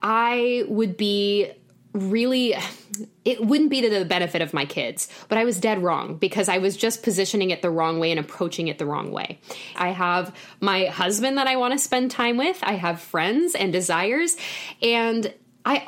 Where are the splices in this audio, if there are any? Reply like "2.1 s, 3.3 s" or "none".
9.8 s